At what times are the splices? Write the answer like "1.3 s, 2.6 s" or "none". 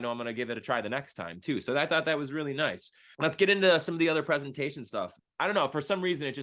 5.2 s